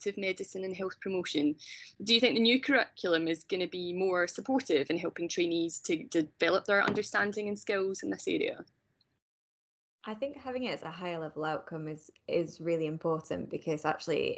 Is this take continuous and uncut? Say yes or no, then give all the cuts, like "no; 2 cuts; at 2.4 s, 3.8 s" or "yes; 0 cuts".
yes; 0 cuts